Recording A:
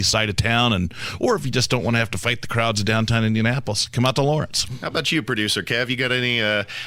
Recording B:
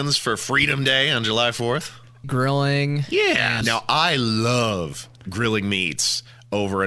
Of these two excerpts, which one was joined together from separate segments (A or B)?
B